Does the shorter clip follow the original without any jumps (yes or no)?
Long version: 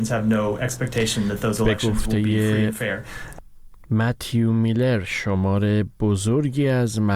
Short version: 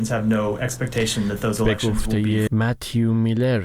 no